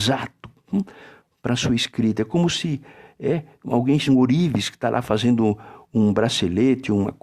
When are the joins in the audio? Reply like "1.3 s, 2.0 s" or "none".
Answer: 4.1 s